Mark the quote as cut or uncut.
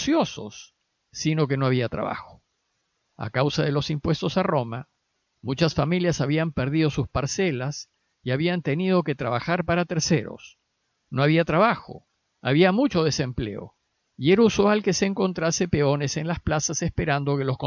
cut